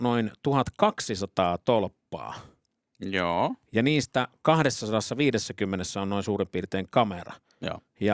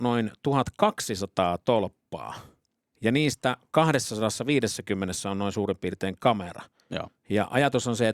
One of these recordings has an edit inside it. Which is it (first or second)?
second